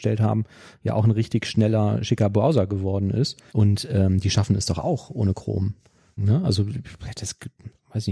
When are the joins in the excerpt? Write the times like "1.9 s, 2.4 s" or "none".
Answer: 3.5 s, 6.2 s